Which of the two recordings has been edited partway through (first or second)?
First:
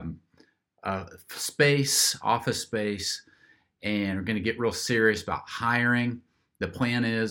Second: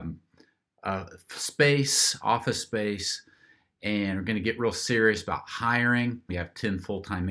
second